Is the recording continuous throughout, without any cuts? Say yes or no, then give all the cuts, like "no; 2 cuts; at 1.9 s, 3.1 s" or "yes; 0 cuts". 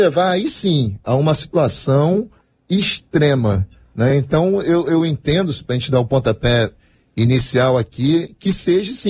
yes; 0 cuts